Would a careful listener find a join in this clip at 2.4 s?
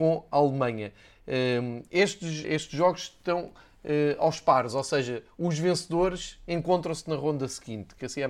yes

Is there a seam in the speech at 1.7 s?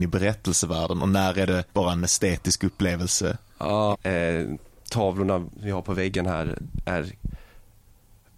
yes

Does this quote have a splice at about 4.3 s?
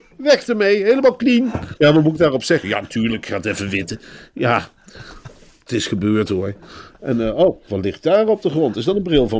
no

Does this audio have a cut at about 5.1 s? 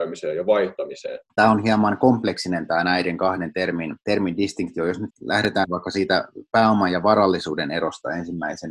yes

